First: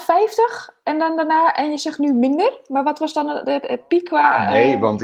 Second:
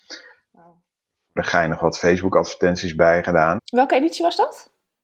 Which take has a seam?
second; 1 cut; at 3.6 s

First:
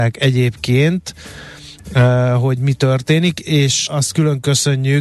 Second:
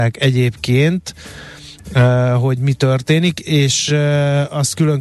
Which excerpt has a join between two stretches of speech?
first; 1 cut; at 3.9 s

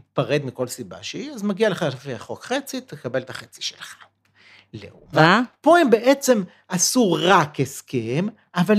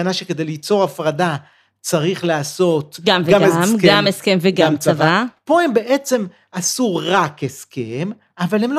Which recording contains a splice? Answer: first; 1 cut; at 5.1 s

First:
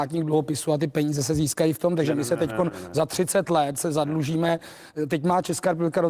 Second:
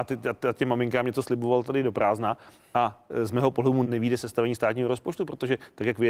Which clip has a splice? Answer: second; 1 cut; at 3.8 s

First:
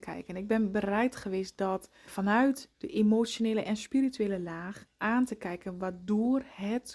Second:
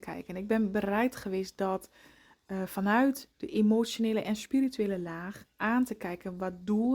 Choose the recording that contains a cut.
first; 1 cut; at 2.1 s

